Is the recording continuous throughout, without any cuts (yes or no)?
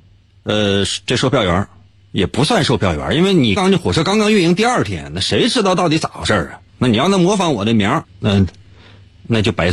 no